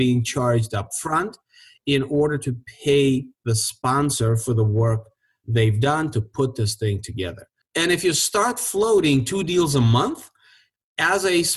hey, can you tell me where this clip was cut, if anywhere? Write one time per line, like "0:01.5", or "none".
0:07.6

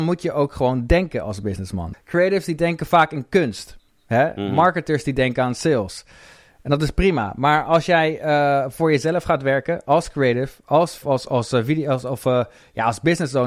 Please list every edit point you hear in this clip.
0:01.9
0:11.0

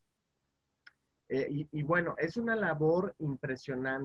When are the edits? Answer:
0:01.5

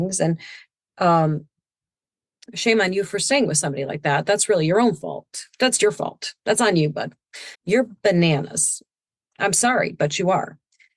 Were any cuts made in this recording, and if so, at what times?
0:07.5

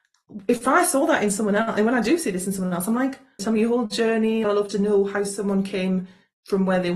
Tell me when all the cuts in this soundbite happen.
0:03.4
0:04.4

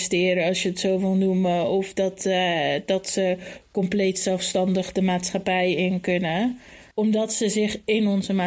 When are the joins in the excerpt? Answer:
0:06.9

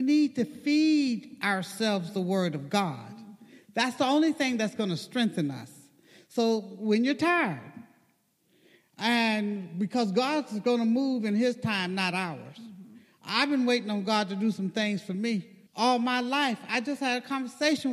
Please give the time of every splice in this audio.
0:15.7

